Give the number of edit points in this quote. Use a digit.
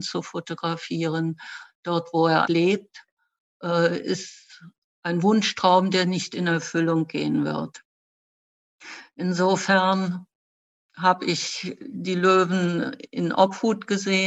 1